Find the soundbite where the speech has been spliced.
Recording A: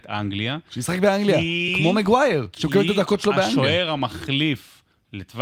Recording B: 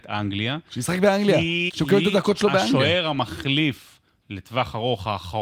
B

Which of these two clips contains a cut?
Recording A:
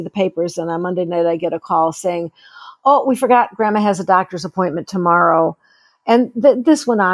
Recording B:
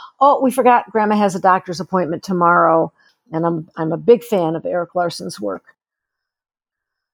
B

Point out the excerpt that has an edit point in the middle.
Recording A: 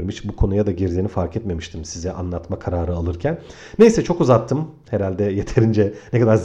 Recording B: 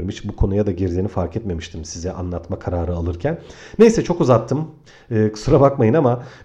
A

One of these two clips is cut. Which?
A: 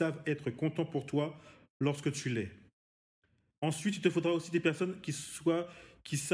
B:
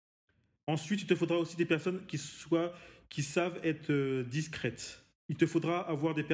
B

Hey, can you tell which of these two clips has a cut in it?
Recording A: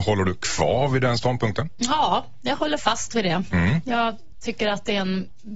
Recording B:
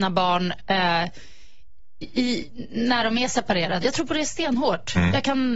B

